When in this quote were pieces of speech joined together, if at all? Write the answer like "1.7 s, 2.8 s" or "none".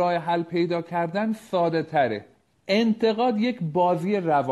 none